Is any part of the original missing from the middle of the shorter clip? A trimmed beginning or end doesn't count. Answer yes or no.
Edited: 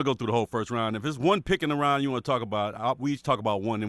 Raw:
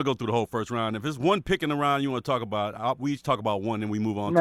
no